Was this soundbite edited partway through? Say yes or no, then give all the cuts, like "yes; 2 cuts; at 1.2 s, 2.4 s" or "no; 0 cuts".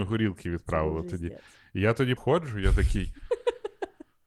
yes; 1 cut; at 2.2 s